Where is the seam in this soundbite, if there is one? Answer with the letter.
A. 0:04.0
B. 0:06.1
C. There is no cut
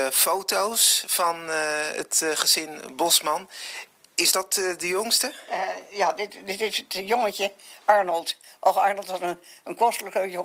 C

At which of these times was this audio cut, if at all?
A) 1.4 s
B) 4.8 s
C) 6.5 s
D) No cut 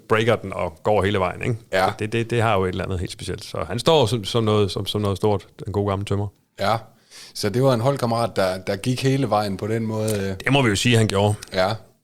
D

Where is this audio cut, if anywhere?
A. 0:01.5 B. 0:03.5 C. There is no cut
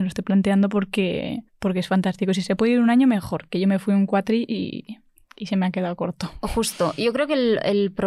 A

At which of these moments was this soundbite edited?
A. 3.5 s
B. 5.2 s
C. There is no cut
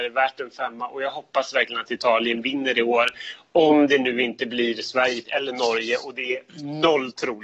B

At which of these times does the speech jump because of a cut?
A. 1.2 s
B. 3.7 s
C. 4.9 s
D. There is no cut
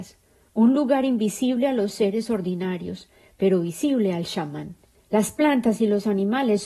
C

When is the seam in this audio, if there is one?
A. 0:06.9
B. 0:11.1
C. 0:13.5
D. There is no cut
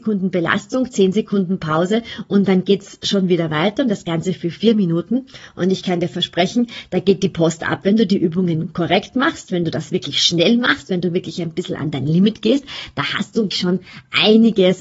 C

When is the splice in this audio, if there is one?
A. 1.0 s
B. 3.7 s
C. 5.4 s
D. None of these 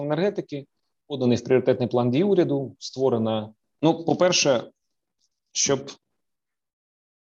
B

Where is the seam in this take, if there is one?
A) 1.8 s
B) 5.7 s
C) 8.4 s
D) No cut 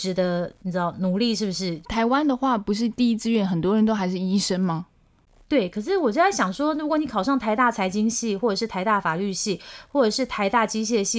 A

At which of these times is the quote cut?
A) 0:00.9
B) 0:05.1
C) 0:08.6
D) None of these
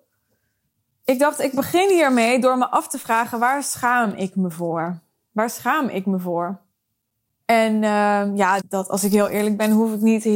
C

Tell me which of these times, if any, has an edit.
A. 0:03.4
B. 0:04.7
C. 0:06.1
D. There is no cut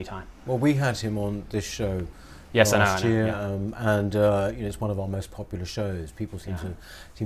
D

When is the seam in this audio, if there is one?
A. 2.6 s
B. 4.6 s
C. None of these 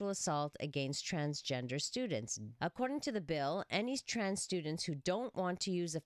A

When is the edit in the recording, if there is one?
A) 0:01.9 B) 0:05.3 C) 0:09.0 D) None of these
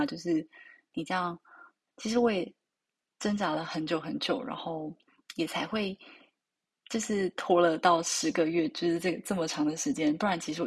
A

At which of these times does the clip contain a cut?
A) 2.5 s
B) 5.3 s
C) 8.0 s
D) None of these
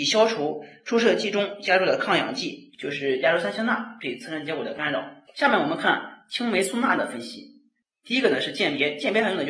D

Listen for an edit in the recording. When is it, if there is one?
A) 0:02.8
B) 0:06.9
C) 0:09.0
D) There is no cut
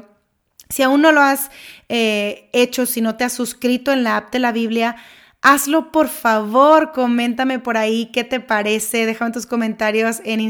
D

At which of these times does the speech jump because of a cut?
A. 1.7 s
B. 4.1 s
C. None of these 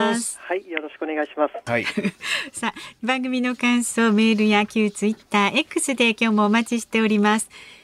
A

